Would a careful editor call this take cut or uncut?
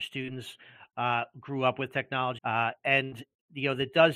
cut